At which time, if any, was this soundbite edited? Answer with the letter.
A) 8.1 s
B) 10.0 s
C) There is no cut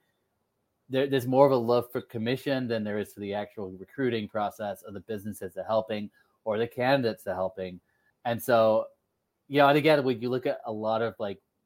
A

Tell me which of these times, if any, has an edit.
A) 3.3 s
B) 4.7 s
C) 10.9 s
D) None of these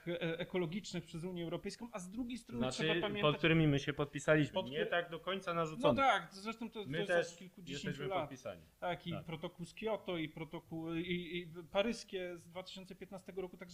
D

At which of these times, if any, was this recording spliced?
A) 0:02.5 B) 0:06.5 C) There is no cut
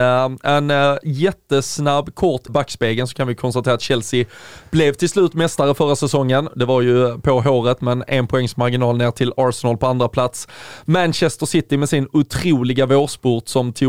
A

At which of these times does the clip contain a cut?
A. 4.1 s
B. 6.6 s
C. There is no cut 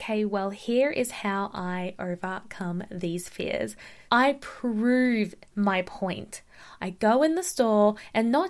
A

